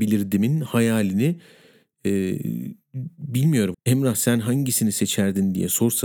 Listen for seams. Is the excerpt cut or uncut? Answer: cut